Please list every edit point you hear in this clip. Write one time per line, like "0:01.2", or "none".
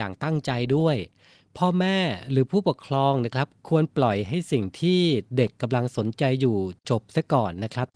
none